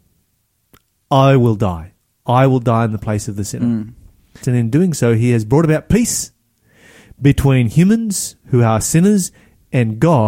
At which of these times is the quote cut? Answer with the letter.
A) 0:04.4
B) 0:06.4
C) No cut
A